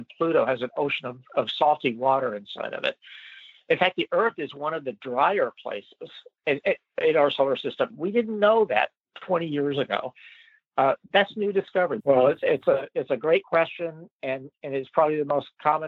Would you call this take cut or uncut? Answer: cut